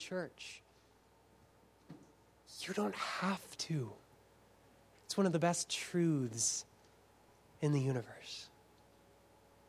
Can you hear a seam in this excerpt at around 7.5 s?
no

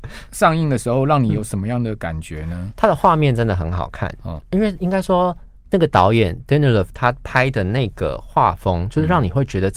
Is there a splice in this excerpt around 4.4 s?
yes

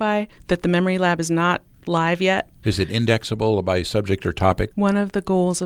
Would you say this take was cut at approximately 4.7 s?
yes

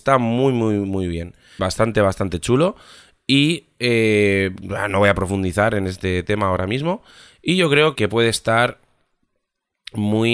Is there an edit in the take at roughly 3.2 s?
no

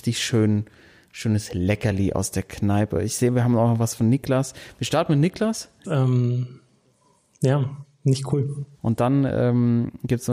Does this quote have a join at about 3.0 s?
no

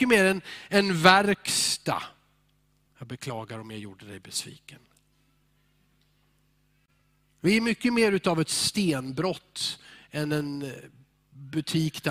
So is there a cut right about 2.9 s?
yes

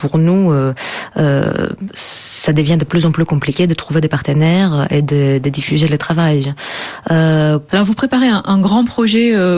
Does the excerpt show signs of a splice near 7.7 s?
yes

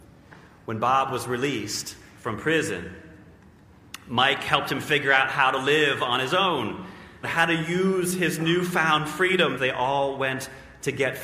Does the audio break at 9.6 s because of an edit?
yes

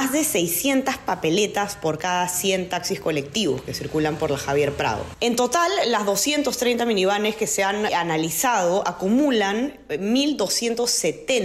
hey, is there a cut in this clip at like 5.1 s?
yes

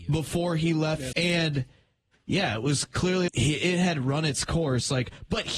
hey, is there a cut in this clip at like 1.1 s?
yes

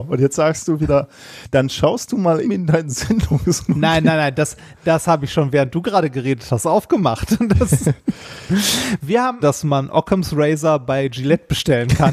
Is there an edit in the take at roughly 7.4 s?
no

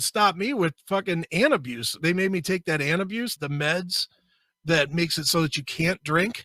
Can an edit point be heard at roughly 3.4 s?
yes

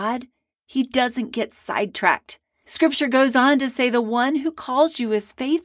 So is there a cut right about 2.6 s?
yes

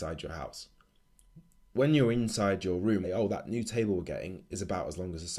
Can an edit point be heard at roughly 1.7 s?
yes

